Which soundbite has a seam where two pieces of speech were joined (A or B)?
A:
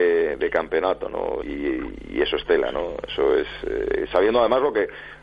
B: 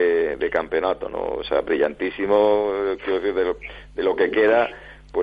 A